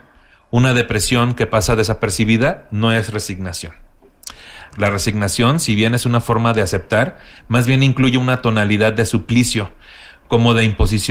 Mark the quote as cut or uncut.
cut